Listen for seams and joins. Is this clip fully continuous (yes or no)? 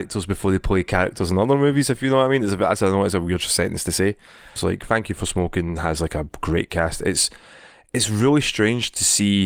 no